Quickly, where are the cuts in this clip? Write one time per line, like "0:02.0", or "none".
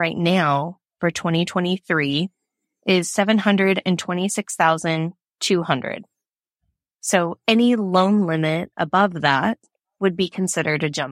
none